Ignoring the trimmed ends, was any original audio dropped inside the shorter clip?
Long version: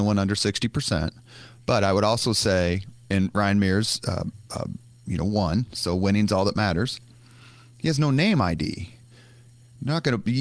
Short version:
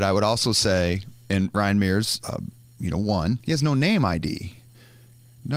yes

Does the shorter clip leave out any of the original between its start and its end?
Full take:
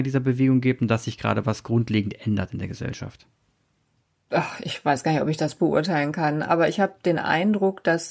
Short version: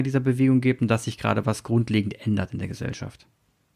no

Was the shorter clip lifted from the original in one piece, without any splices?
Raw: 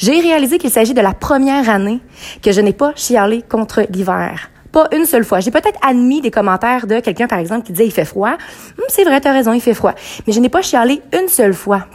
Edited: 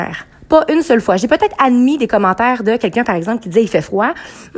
yes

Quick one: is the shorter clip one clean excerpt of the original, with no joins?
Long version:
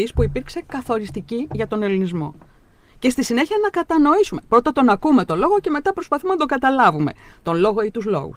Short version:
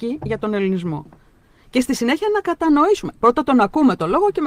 yes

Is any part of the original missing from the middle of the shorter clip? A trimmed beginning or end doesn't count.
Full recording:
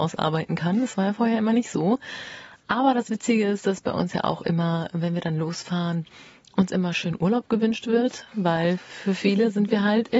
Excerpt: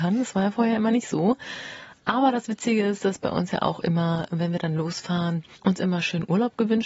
yes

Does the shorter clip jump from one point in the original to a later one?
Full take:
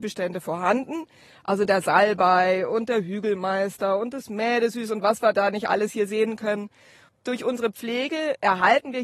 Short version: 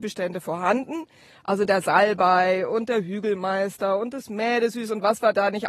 no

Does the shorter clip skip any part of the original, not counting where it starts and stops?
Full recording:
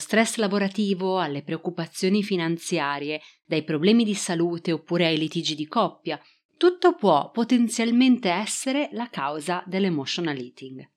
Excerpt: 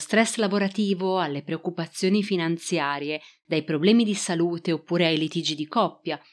no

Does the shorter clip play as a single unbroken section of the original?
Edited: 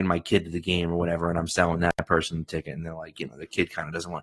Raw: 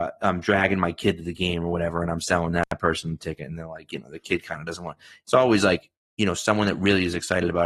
yes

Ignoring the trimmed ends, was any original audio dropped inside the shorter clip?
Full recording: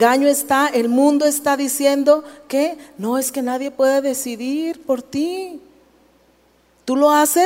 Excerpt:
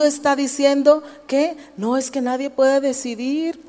no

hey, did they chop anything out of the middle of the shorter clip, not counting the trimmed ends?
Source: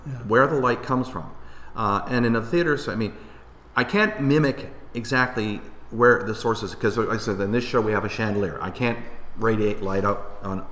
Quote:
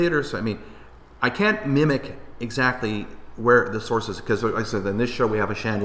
no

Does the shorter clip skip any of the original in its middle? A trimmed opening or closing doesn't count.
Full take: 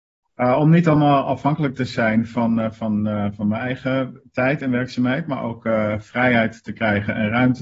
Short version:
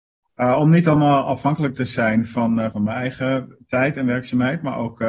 yes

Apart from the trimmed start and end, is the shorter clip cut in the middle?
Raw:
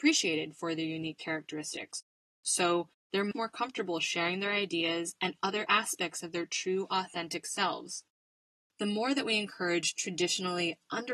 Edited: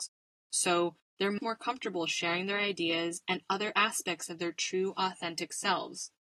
no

